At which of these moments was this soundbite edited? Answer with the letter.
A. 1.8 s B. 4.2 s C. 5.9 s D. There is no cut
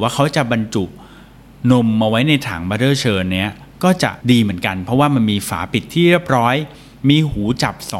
B